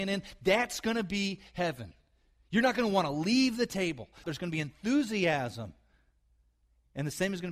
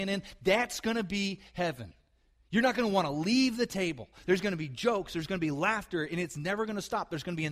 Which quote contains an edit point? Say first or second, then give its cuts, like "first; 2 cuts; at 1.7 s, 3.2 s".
first; 1 cut; at 4.2 s